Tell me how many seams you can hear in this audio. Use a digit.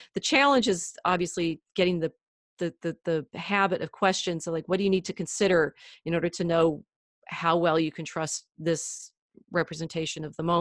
0